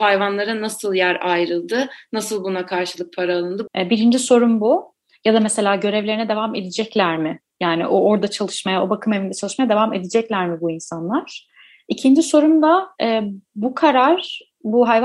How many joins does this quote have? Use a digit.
1